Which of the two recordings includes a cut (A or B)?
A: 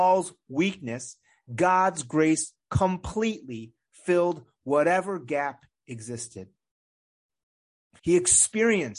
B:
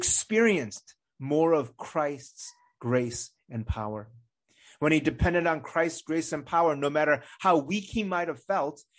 A